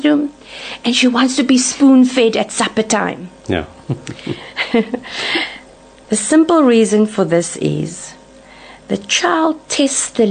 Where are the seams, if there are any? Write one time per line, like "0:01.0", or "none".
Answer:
0:06.0